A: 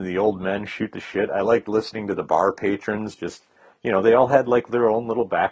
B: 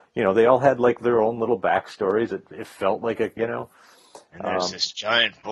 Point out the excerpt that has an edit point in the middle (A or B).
B